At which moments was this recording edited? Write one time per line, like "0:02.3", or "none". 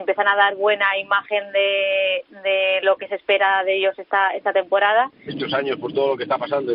0:05.3